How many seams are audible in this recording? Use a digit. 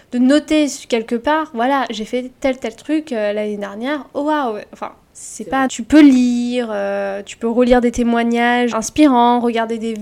2